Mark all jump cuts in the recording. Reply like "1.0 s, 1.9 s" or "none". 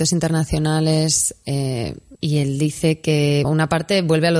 2.2 s, 3.4 s